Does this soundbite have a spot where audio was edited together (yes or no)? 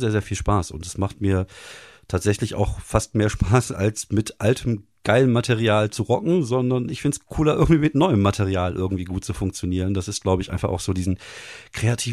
no